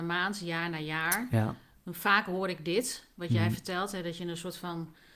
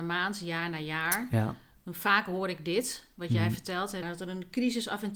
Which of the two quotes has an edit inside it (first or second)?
second